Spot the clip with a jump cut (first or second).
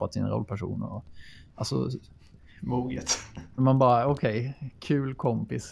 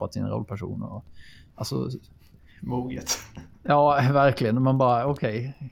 first